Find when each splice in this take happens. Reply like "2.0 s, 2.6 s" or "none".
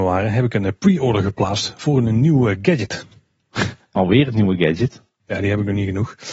none